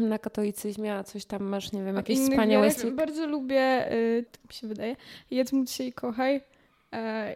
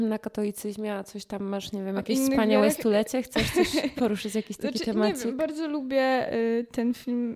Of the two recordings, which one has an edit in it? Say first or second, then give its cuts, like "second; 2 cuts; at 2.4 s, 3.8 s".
first; 2 cuts; at 2.8 s, 4.3 s